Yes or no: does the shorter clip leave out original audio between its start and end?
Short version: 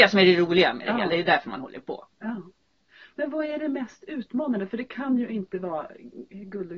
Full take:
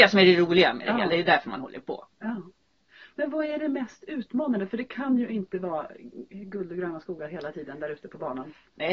no